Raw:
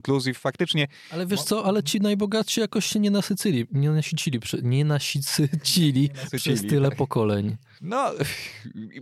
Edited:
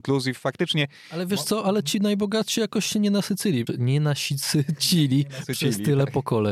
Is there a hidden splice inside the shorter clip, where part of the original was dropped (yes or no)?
yes